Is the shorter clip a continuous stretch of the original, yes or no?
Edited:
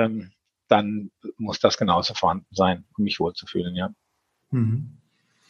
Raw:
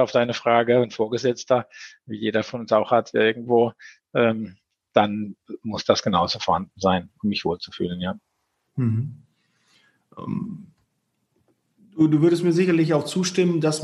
yes